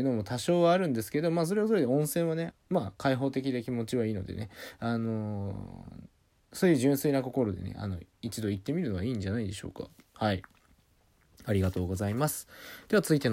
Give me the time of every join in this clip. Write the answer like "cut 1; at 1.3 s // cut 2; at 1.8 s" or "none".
cut 1; at 2.5 s